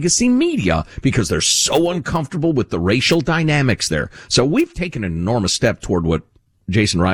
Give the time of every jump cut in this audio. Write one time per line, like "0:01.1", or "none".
none

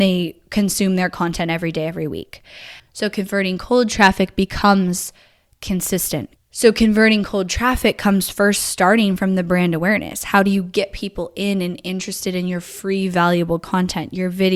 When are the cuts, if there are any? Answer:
0:02.8
0:06.4

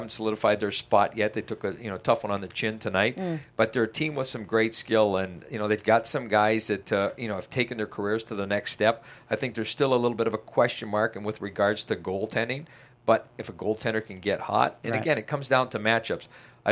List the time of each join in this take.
none

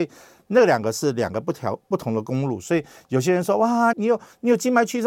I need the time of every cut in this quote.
0:03.9

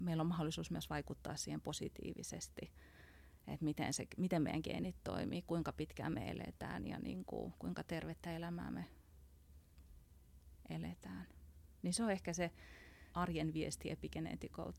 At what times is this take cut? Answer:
0:13.1

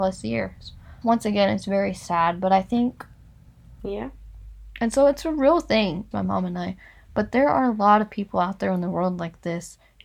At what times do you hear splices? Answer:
0:01.0
0:03.8
0:06.1

